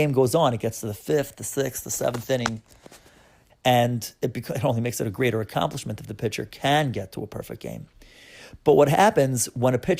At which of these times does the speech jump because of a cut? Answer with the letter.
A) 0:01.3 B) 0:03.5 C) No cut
B